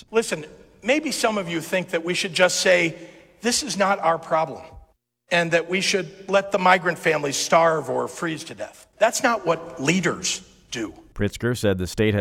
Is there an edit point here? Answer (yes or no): yes